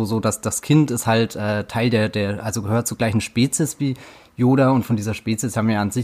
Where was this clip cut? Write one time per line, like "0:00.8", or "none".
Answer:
none